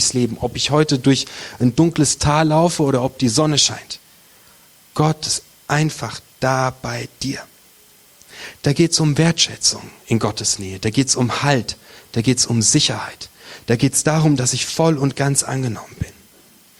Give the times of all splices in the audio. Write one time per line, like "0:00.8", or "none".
none